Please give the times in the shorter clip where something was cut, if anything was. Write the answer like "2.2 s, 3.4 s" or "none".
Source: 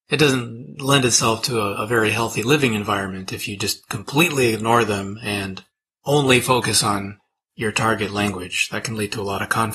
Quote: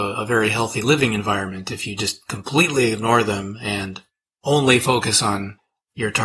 none